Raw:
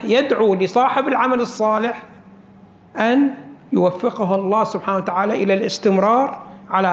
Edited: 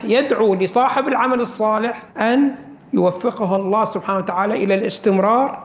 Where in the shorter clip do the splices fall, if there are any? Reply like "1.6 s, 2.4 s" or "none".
2.1 s